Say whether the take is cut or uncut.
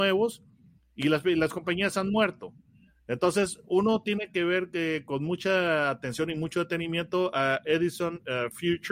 uncut